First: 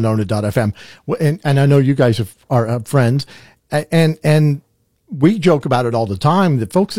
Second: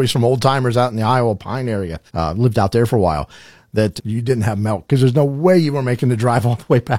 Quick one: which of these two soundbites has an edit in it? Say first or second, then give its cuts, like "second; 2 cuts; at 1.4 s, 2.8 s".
second; 2 cuts; at 2.1 s, 4.0 s